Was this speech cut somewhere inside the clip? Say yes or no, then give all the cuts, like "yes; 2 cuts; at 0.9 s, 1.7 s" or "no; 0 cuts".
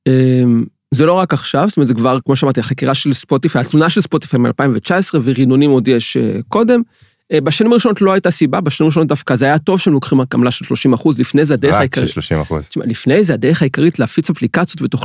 yes; 1 cut; at 2.2 s